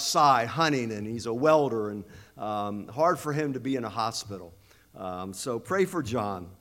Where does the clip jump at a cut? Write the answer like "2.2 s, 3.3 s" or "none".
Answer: none

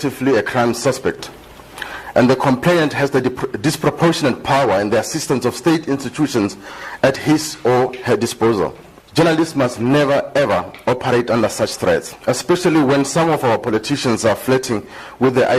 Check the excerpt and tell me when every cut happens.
none

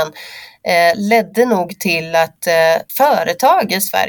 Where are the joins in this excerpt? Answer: 2.9 s

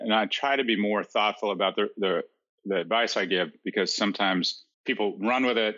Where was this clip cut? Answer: 4.7 s

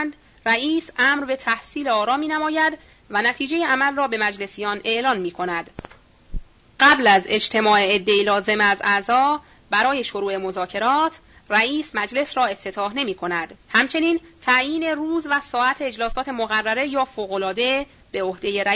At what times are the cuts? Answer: 6.7 s, 13.6 s

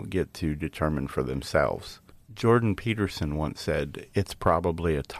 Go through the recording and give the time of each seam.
4.1 s

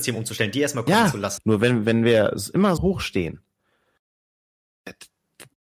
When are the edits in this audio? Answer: 1.4 s, 2.8 s

